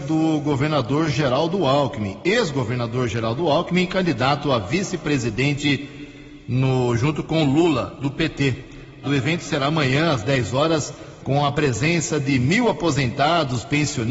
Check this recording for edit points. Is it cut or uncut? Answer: cut